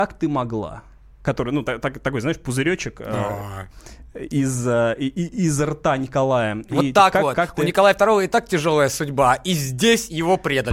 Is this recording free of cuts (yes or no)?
yes